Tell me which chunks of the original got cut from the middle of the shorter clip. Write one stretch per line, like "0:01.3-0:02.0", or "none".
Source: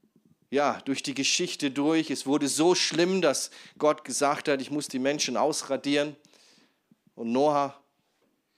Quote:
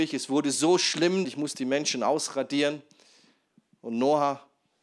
0:03.2-0:04.6